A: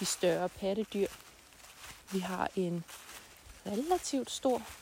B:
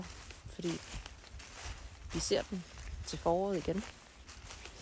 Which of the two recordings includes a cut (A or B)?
A